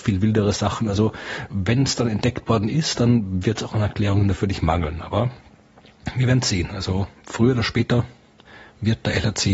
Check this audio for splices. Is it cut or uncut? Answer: uncut